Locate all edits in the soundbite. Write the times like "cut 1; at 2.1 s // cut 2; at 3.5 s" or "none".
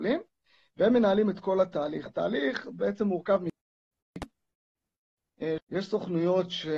cut 1; at 5.6 s